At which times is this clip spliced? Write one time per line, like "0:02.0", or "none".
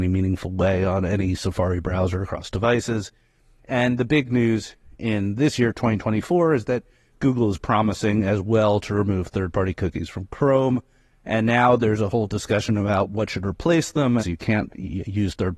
0:14.2